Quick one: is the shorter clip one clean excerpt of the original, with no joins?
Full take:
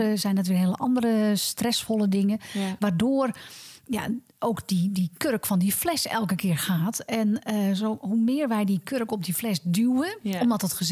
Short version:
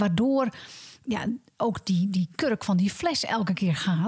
yes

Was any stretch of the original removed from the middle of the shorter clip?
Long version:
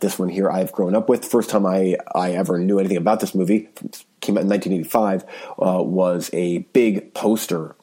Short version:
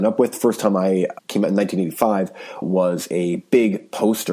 yes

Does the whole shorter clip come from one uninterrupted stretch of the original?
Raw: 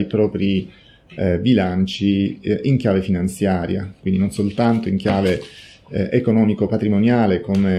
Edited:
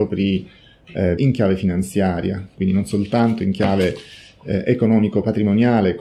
no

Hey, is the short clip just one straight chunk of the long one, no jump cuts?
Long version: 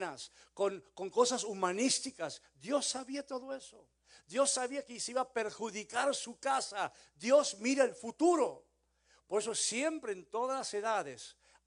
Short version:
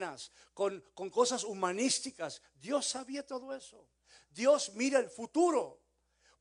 no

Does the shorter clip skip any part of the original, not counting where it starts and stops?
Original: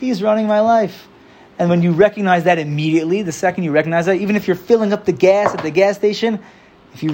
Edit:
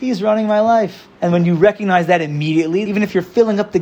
yes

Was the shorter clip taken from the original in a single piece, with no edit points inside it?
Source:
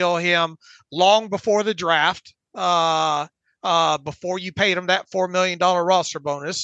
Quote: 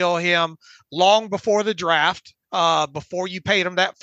no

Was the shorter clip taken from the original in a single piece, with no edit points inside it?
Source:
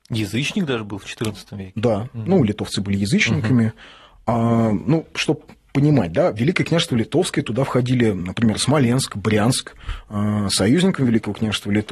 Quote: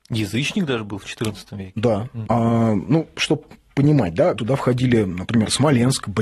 no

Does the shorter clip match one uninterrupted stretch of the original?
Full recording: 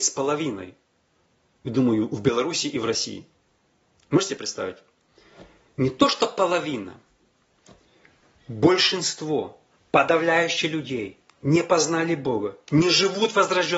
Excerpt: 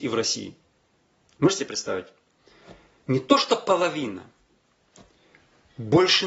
yes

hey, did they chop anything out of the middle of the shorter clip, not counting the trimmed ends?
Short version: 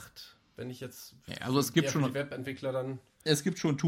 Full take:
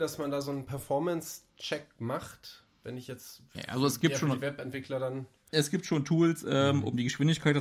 no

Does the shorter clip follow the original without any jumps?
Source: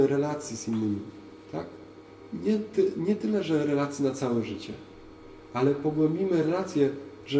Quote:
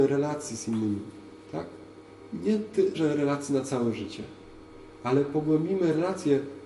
no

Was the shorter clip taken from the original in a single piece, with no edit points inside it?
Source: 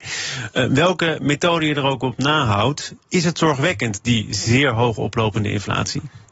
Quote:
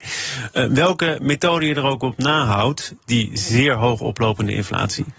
no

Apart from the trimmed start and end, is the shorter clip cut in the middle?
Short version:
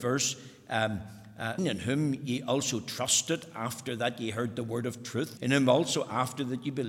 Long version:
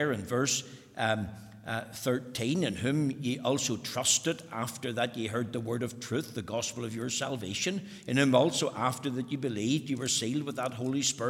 yes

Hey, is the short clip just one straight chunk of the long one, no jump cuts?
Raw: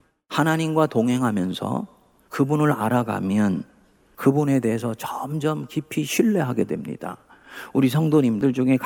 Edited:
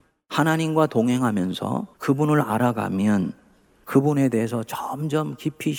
no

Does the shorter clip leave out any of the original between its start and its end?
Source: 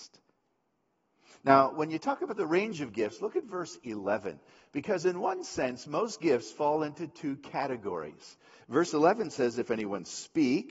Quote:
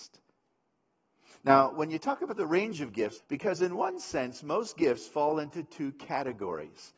yes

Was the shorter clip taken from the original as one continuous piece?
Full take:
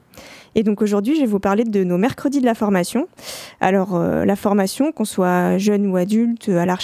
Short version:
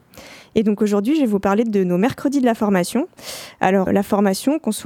no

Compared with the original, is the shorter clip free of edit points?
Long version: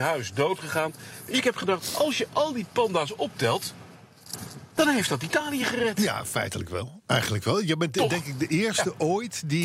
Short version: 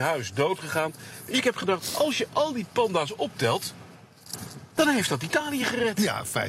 yes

